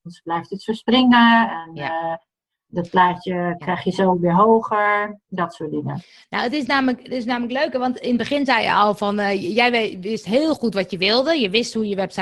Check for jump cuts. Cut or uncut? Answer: uncut